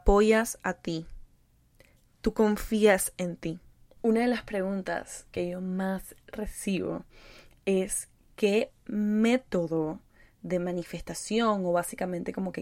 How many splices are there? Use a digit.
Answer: 1